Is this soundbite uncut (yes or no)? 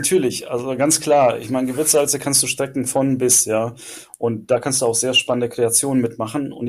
yes